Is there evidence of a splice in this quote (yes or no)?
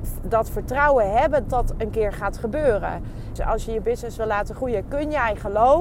yes